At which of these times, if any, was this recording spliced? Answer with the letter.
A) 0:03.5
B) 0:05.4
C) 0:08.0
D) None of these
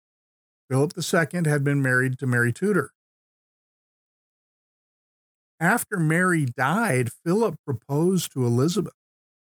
D